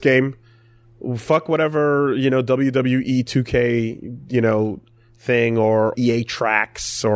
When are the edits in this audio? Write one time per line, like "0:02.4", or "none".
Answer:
0:05.9